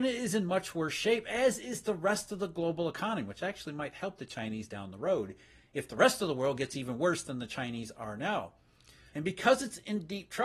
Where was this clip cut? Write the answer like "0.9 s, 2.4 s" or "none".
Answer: 9.1 s